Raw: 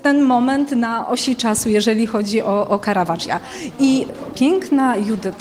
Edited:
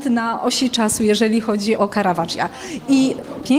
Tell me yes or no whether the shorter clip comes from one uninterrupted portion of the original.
no